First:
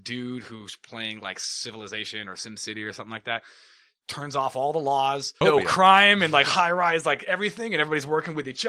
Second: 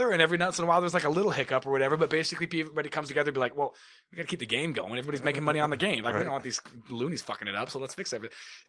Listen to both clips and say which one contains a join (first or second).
first